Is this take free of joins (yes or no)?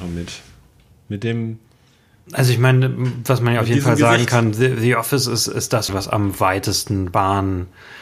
no